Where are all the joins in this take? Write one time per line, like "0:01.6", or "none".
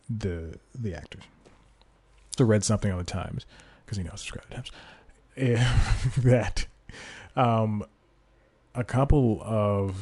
0:02.4